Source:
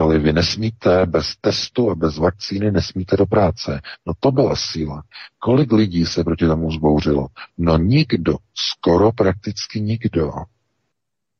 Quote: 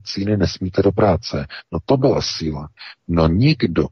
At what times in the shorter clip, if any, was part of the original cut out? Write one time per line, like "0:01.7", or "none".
0:03.0